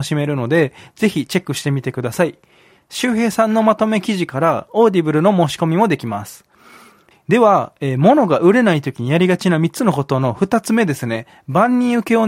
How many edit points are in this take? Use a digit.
1